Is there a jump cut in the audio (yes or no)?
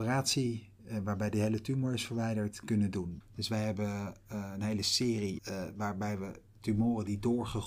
yes